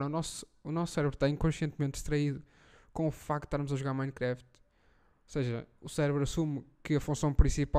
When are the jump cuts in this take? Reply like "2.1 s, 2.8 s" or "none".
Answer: none

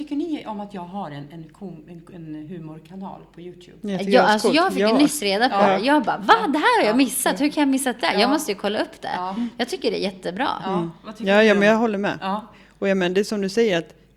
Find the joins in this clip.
none

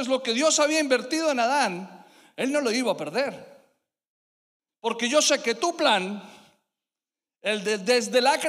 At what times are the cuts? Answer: 4.7 s

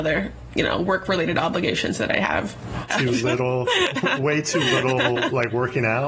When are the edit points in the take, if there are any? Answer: 2.9 s

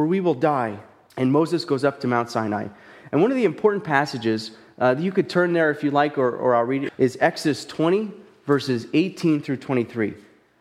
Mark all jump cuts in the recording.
1.1 s, 6.9 s

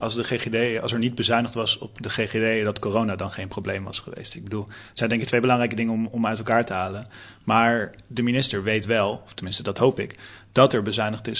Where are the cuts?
none

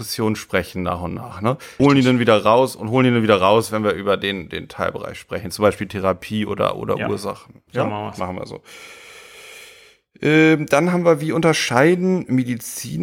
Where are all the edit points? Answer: 1.8 s

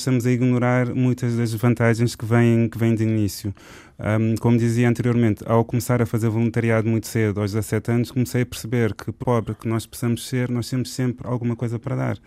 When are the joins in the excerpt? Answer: 9.2 s

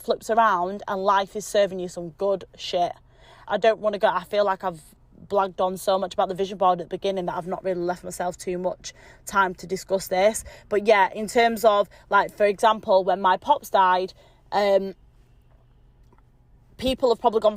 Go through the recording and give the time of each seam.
3.5 s

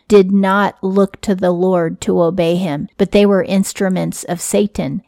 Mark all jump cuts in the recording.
2.9 s

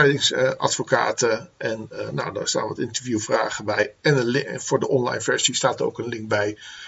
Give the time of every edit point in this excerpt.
none

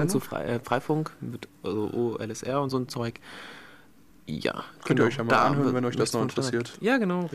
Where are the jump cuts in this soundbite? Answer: none

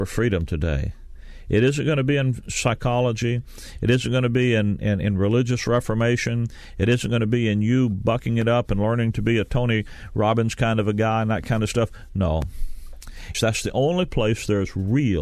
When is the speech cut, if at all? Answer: 13.3 s

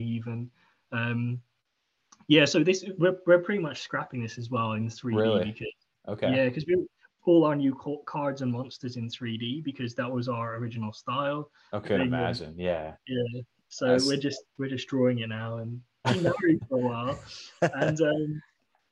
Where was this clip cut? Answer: 7.1 s, 11.8 s, 16.0 s

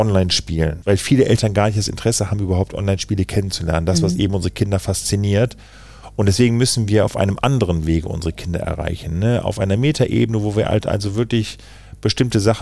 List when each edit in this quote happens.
none

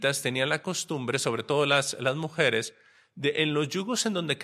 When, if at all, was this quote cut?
none

